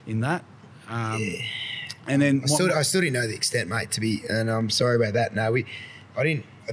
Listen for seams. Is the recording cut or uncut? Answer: uncut